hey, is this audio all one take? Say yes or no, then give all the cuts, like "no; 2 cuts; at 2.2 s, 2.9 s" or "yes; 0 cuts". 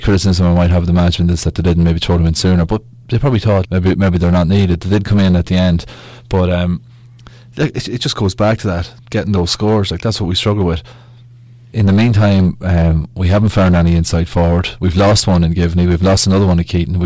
no; 2 cuts; at 3.6 s, 11.7 s